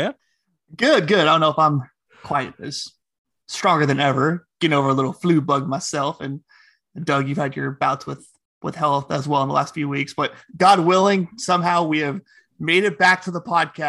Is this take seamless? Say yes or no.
yes